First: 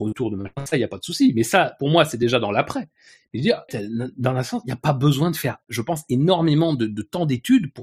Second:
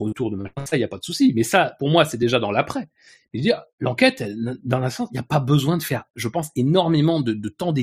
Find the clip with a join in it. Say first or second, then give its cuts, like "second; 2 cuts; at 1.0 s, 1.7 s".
first; 1 cut; at 3.7 s